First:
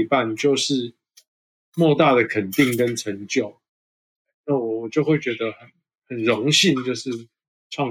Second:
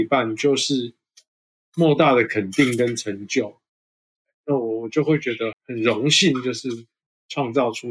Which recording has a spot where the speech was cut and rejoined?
second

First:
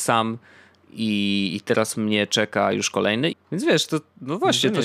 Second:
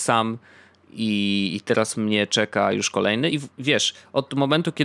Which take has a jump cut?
first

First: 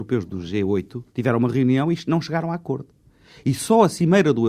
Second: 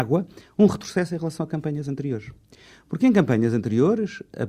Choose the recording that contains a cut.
first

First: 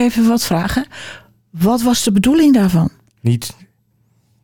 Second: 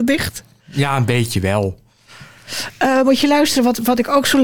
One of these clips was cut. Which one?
first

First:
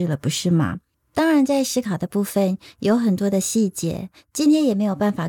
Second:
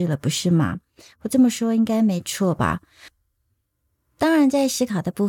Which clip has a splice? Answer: first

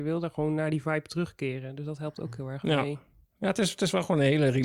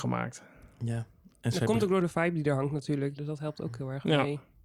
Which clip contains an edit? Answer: second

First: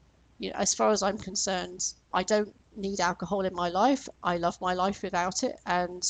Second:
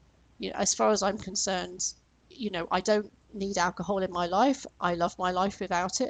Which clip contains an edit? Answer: first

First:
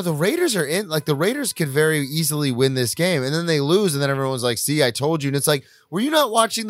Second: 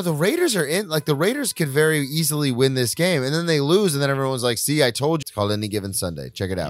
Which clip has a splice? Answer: second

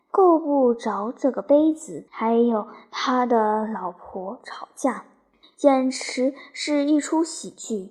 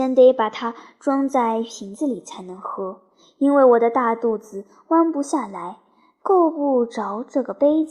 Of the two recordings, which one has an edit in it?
first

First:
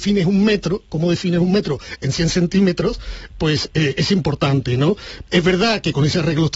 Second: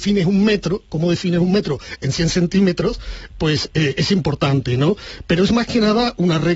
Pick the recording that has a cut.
first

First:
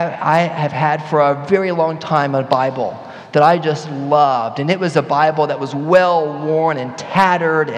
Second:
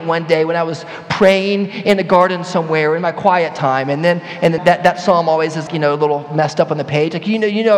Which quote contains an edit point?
second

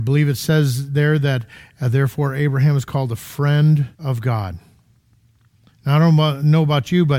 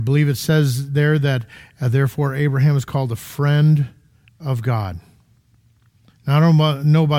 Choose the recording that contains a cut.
first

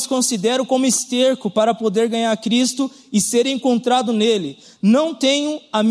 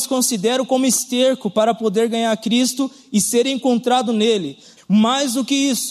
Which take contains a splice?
second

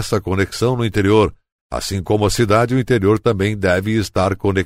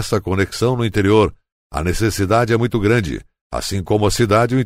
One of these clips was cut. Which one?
first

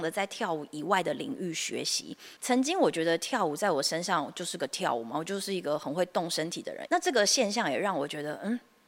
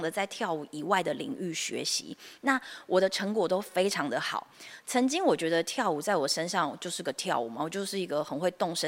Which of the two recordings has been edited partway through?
first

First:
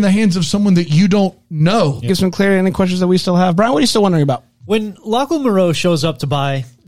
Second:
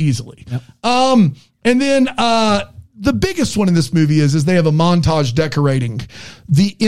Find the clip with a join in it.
first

